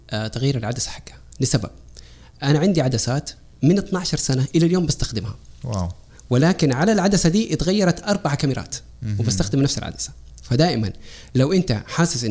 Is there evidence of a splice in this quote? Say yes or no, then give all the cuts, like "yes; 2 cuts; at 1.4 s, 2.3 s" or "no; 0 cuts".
no; 0 cuts